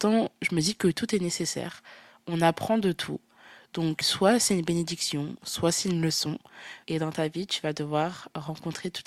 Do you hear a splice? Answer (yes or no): yes